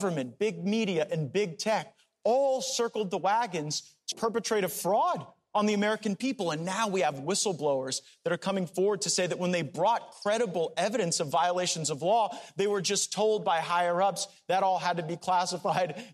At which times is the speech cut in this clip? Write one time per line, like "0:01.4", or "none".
0:04.1